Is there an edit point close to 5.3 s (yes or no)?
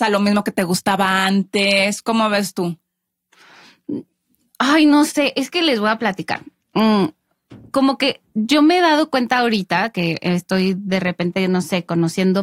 no